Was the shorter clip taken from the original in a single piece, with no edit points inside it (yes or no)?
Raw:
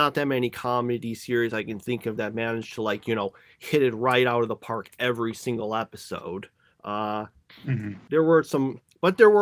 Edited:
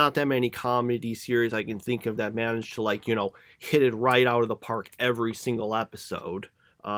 yes